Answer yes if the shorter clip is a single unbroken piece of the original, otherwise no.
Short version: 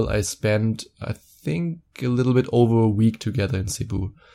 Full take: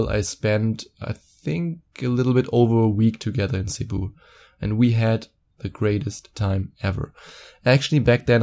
yes